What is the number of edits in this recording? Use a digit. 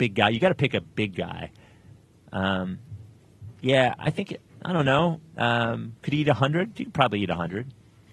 0